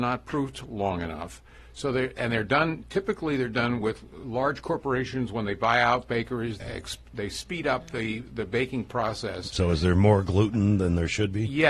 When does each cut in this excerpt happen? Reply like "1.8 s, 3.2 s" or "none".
6.6 s